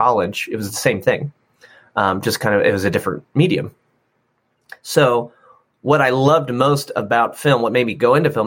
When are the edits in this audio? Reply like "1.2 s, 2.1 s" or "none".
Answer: none